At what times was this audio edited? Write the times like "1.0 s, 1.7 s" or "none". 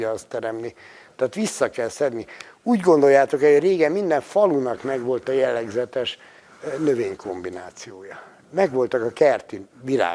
none